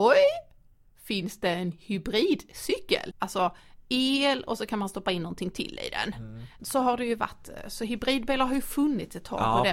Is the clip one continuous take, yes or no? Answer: no